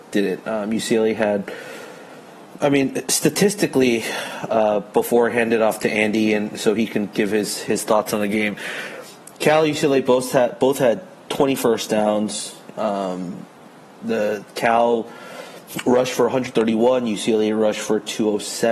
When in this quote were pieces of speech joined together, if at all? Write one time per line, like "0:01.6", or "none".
none